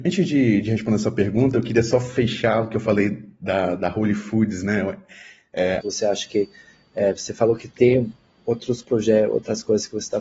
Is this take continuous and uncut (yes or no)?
no